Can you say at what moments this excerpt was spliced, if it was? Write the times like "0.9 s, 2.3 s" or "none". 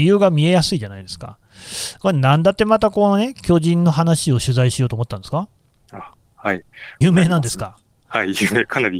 7.0 s

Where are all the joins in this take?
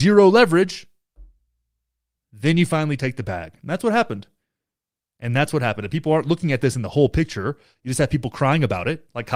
none

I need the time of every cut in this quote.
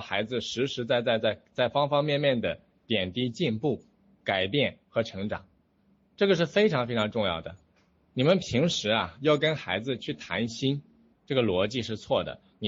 11.1 s

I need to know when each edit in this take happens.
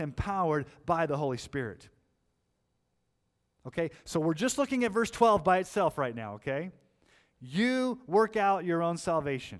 none

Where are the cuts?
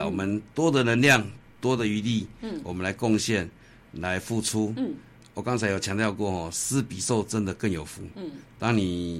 none

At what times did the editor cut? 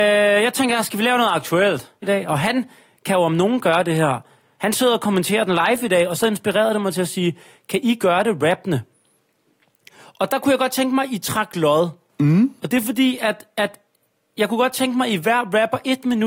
2.0 s

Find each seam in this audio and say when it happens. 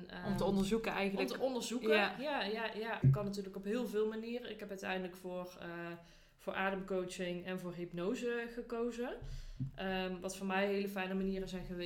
3.0 s

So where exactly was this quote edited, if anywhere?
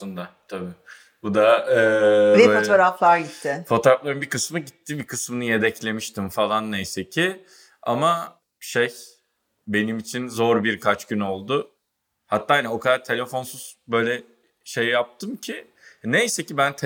none

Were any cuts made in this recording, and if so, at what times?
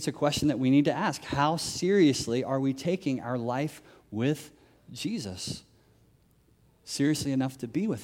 none

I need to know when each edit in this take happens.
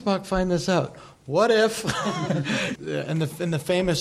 2.8 s

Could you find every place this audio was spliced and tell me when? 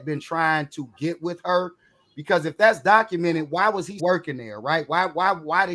4.0 s

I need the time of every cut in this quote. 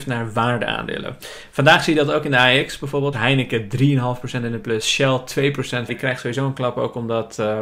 3.1 s, 5.9 s

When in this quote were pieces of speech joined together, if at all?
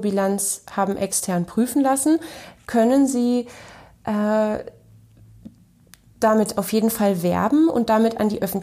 none

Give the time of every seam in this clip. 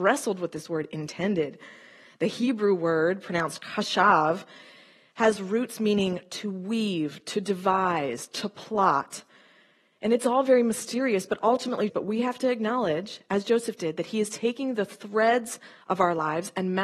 11.9 s

